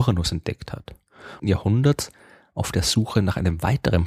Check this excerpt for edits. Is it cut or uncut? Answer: cut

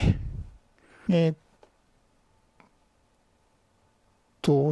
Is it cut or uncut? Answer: cut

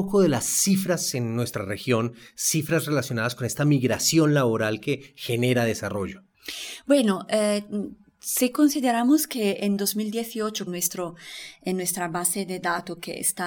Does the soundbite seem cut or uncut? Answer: cut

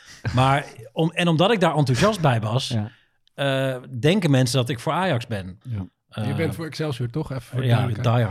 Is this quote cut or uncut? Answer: cut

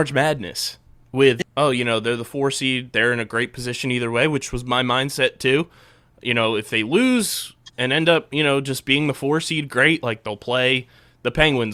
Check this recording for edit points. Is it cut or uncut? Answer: cut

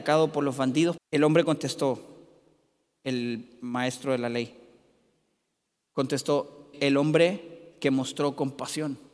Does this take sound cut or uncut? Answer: cut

